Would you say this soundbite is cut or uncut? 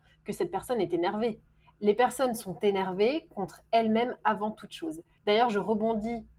uncut